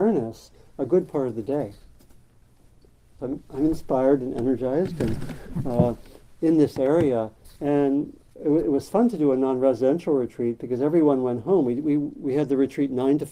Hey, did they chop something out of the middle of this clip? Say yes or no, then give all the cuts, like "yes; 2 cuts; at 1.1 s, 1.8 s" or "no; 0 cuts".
yes; 1 cut; at 3.2 s